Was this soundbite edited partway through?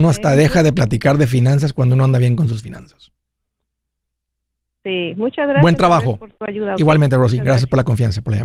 no; 0 cuts

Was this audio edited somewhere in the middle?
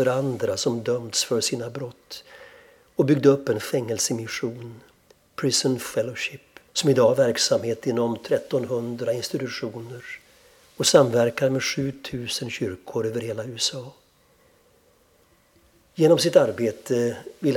yes; 1 cut; at 6.7 s

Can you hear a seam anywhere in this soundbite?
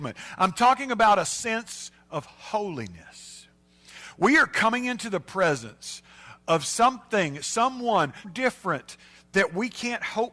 yes; 1 cut; at 8.2 s

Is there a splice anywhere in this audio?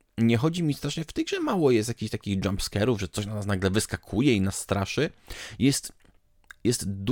no; 0 cuts

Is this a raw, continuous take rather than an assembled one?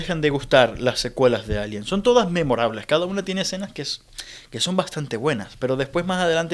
yes; 0 cuts

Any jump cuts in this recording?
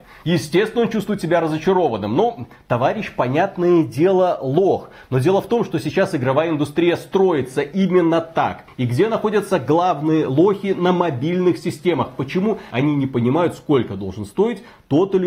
yes; 2 cuts; at 8.7 s, 12.7 s

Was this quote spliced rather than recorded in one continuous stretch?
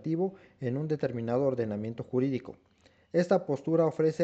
no; 0 cuts

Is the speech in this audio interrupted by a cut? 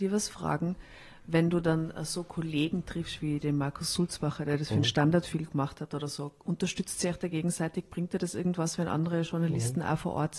no; 0 cuts

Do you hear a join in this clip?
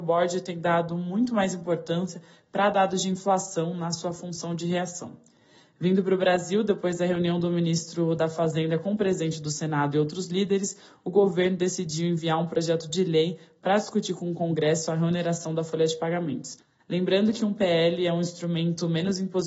no; 0 cuts

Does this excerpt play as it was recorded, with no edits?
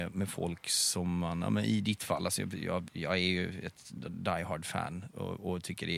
yes; 0 cuts

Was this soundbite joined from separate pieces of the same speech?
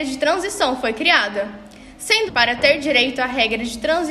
yes; 1 cut; at 2.3 s

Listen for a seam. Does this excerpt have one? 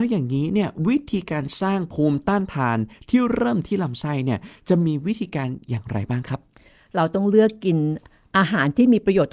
no; 0 cuts

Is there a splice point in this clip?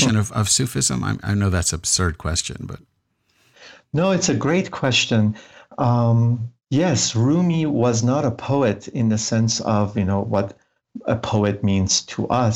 no; 0 cuts

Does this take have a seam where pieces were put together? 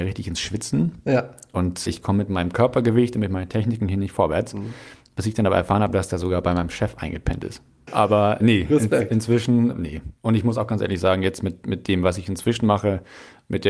yes; 1 cut; at 8.4 s

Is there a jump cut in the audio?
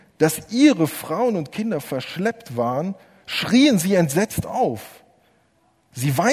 no; 0 cuts

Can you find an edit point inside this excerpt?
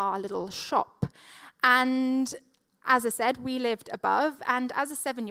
no; 0 cuts

